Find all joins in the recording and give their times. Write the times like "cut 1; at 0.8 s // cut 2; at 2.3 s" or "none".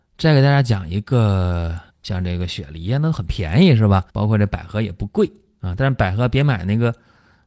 cut 1; at 1.9 s // cut 2; at 4.1 s